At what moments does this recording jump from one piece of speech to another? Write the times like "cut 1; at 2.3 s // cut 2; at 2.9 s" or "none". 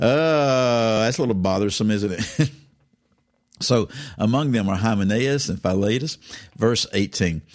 none

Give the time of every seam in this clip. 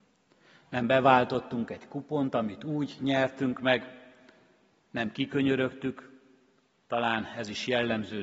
none

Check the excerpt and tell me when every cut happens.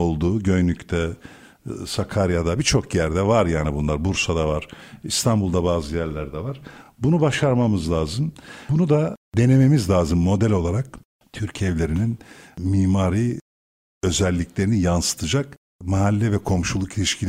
none

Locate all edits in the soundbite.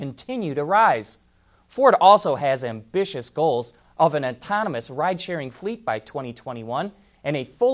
none

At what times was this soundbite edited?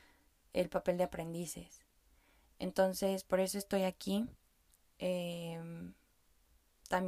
none

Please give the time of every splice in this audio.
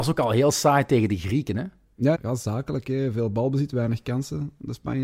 cut 1; at 2.1 s

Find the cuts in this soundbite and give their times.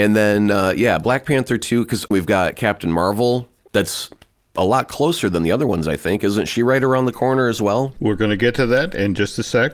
none

